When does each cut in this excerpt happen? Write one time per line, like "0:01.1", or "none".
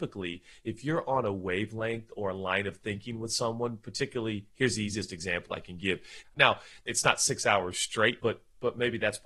0:06.2
0:08.2